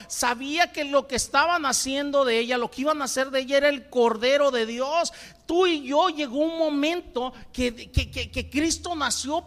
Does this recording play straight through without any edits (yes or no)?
yes